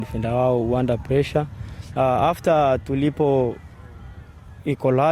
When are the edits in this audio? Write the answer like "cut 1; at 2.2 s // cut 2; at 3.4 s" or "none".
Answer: cut 1; at 2.0 s

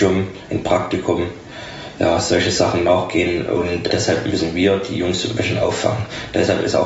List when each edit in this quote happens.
cut 1; at 3.9 s

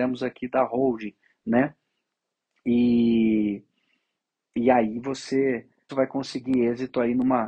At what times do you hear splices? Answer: cut 1; at 5.9 s

